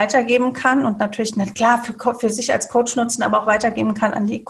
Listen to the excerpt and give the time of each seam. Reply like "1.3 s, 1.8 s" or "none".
none